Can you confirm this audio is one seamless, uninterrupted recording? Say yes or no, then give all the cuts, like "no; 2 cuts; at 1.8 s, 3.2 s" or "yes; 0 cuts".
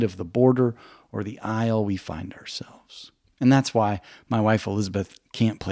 yes; 0 cuts